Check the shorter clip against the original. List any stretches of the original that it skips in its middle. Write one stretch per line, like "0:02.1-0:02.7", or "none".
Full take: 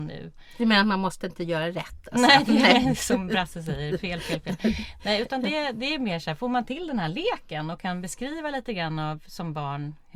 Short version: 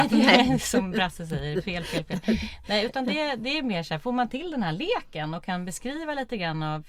none